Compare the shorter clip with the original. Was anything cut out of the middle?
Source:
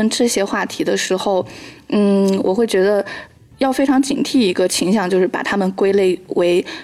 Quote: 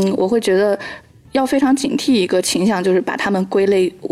no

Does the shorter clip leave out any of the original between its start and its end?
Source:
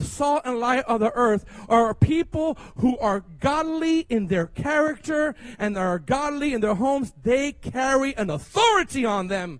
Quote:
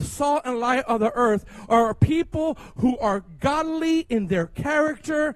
no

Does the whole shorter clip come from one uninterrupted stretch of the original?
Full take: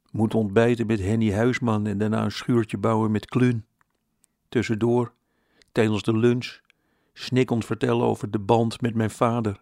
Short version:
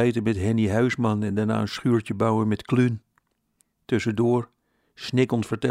no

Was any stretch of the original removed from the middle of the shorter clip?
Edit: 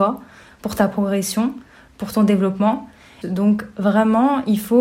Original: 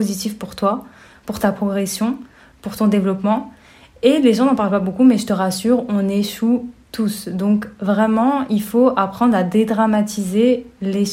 yes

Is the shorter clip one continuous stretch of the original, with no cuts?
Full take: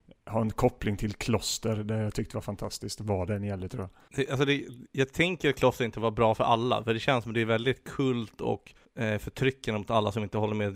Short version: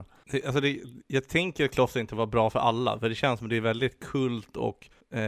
yes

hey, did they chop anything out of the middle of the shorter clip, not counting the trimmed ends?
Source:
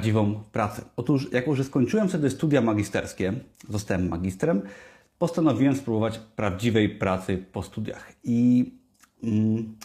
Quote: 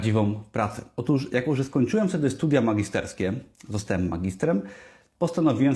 no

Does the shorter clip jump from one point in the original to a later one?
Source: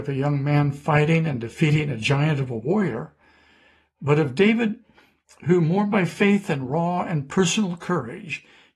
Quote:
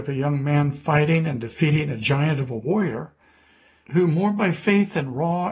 yes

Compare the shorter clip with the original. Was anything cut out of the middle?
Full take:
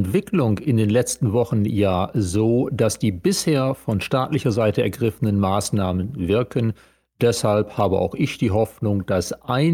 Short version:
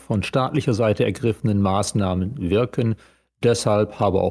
no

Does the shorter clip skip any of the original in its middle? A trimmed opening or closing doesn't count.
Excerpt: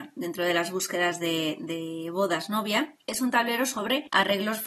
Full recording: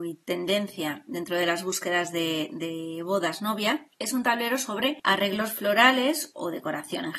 no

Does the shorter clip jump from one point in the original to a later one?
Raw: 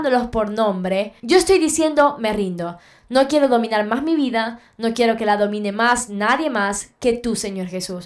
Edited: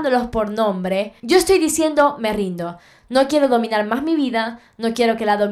no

